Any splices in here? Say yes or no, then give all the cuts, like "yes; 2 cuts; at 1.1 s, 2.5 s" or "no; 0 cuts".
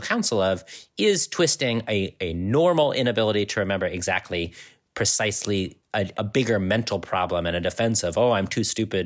yes; 1 cut; at 6.1 s